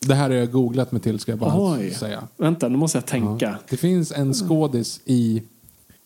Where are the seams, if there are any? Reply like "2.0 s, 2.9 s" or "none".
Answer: 3.7 s